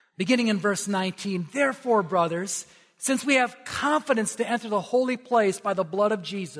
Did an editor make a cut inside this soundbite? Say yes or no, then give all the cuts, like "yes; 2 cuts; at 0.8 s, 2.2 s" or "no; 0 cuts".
no; 0 cuts